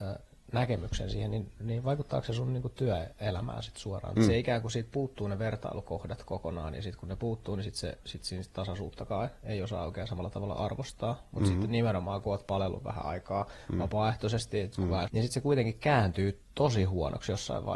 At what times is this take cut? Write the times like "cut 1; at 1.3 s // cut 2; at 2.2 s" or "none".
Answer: cut 1; at 4.2 s // cut 2; at 15.1 s